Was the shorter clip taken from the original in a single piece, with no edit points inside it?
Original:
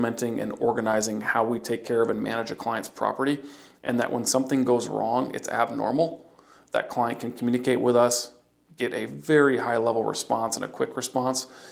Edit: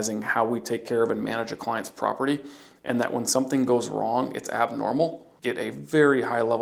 no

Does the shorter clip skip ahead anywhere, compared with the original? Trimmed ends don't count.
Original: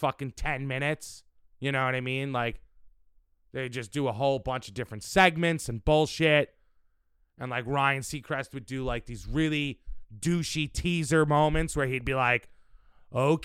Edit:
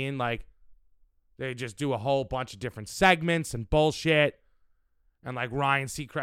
no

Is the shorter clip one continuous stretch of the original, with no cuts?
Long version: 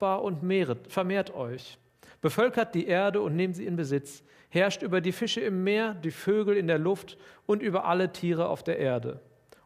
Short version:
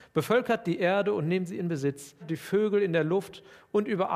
no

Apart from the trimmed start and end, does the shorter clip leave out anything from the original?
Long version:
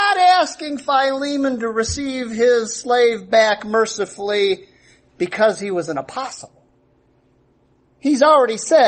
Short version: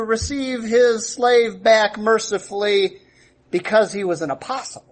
no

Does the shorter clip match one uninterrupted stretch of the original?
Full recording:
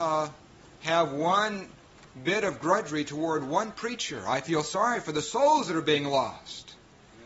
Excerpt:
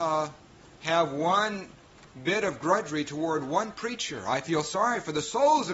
yes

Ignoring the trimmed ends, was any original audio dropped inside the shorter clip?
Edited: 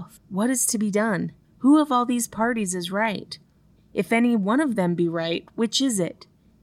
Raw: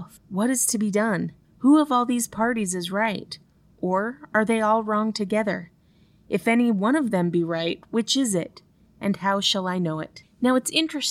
yes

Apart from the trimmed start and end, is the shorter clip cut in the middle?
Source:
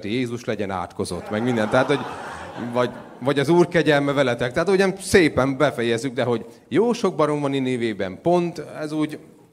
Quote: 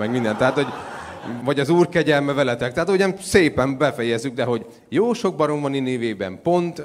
yes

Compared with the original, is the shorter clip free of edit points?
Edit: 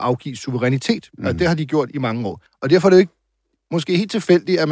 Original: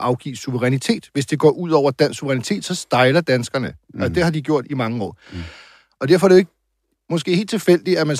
no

